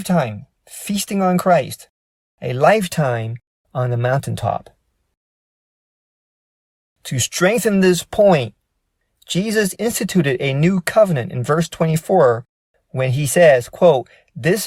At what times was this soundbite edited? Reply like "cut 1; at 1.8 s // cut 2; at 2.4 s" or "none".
cut 1; at 9.8 s